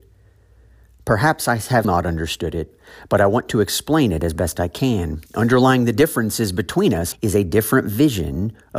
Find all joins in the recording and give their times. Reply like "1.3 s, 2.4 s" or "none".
1.8 s, 5.3 s, 7.1 s